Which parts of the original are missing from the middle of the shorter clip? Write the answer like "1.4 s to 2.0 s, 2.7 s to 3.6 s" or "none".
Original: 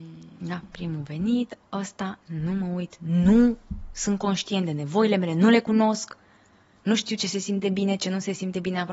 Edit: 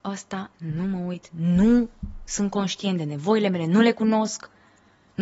none